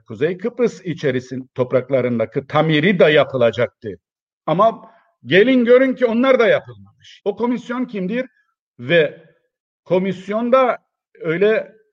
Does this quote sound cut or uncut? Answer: cut